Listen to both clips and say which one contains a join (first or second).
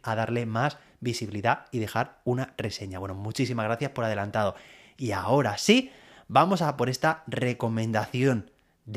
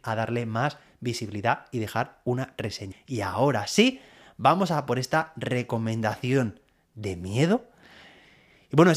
second